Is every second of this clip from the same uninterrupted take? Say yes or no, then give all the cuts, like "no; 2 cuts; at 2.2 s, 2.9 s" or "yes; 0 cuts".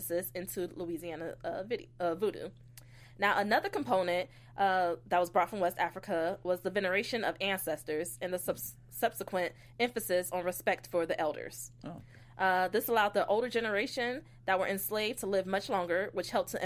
yes; 0 cuts